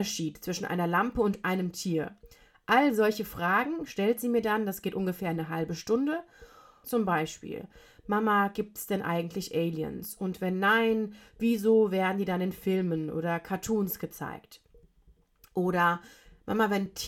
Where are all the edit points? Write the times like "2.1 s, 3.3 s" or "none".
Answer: 6.8 s